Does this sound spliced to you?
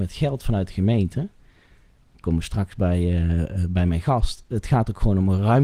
no; 0 cuts

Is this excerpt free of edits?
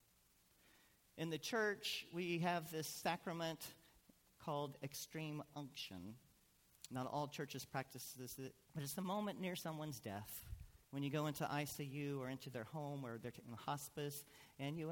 no; 2 cuts; at 8.7 s, 10.8 s

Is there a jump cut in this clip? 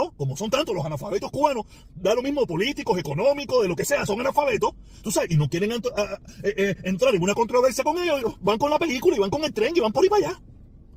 no; 0 cuts

